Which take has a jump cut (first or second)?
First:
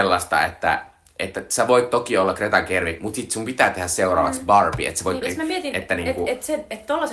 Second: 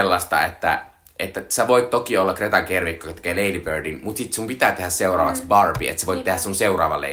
first